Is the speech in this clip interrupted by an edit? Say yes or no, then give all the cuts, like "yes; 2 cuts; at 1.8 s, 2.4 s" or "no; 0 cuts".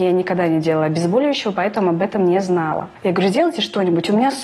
no; 0 cuts